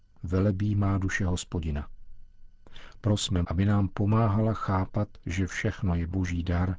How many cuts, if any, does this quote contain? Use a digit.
1